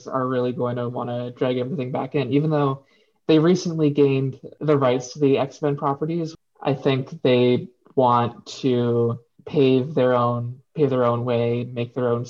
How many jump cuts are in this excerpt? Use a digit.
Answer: 1